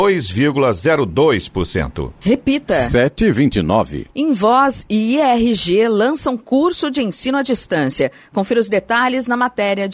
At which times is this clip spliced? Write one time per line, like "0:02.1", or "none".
0:02.2